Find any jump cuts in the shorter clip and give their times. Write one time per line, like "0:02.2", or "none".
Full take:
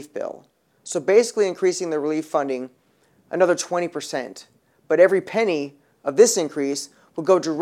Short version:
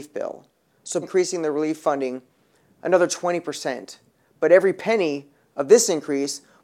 0:01.0